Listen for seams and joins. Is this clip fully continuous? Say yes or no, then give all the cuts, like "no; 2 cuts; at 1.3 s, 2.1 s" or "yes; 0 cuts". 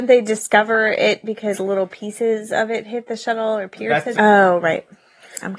no; 1 cut; at 4.1 s